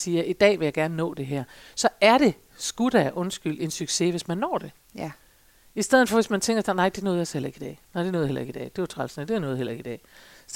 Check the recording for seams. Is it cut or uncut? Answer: uncut